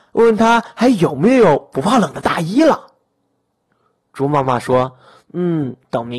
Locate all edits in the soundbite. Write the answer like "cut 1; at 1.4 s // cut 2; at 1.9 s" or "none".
none